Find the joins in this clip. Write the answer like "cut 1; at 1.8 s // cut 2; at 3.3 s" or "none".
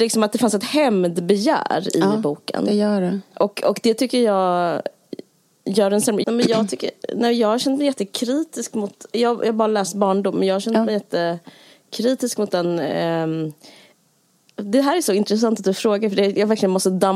cut 1; at 3.3 s // cut 2; at 6.2 s